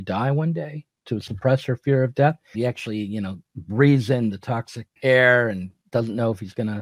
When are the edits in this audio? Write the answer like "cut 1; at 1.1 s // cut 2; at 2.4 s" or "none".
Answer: cut 1; at 2.5 s // cut 2; at 5.0 s